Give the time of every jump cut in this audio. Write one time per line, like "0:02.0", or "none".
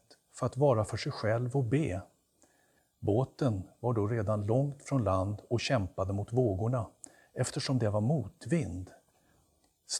0:02.8